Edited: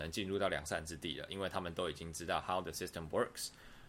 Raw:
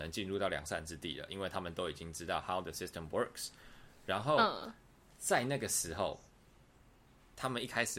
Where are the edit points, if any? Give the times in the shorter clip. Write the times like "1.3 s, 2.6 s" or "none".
none